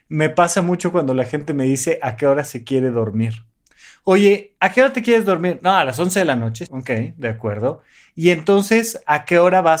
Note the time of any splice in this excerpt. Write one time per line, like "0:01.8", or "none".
0:06.7